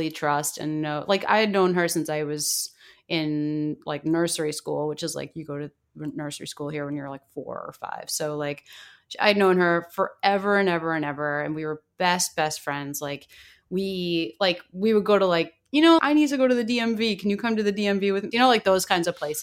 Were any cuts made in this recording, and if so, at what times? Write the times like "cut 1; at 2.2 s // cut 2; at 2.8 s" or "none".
cut 1; at 16.0 s // cut 2; at 18.3 s